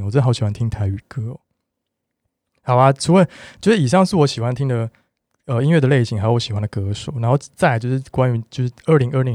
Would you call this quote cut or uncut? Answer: uncut